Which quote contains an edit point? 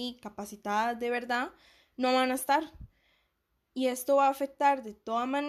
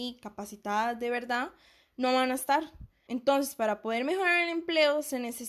second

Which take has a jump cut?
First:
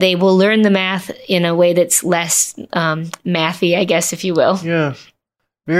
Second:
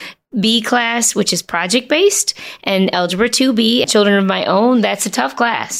second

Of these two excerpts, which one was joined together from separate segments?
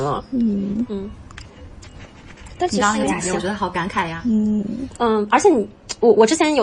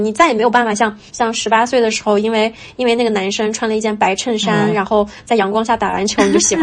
second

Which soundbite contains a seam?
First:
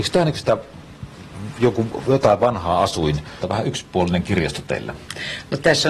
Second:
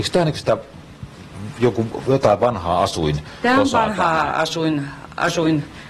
first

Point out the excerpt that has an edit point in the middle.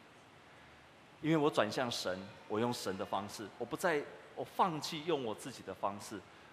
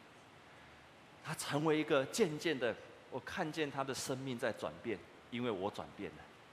first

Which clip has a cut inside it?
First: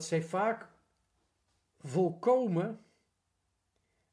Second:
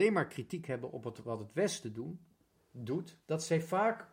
second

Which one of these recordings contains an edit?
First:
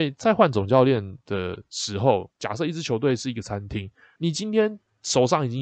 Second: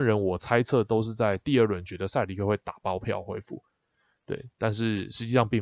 first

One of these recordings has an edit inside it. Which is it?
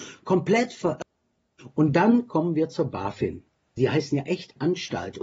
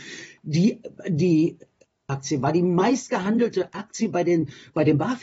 first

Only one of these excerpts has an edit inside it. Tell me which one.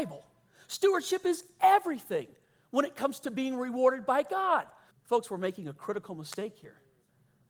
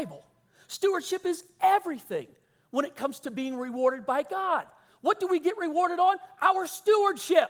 first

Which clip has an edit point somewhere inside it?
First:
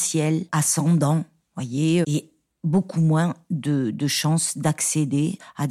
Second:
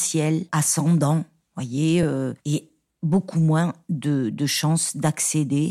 first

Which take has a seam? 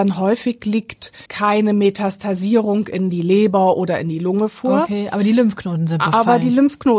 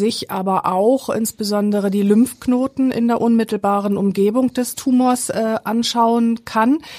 first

